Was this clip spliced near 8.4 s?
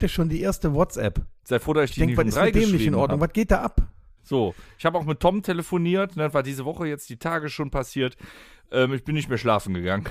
no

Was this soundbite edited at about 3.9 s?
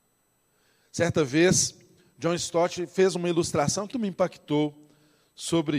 yes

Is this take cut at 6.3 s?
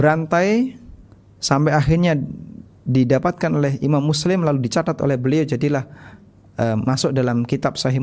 no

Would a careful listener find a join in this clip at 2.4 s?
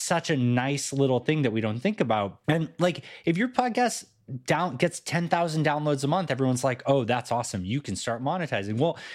yes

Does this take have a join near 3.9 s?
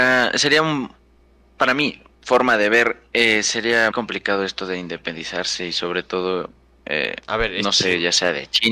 yes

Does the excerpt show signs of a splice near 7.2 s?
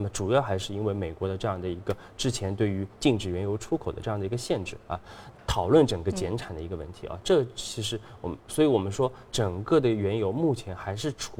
no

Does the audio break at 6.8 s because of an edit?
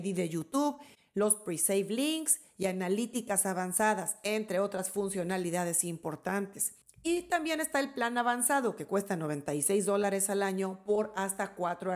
yes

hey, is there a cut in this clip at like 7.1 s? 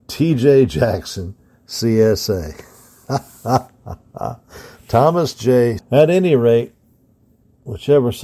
no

